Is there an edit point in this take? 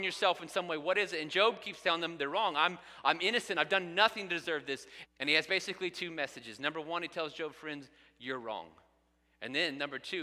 yes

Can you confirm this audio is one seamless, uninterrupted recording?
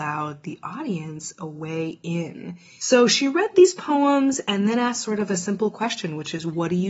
no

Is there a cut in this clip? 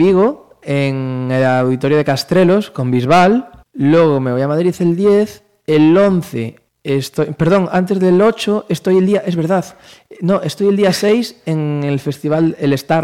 no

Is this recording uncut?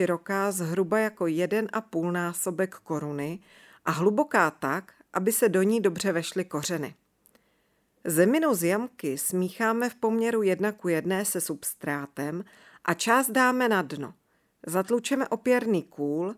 yes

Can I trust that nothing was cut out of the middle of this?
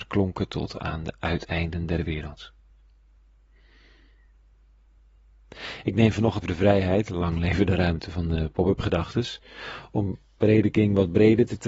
no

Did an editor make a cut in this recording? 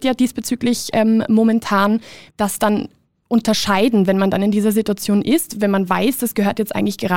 yes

